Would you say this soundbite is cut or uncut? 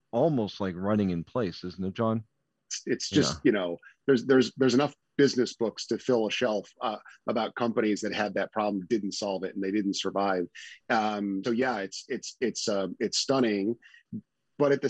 cut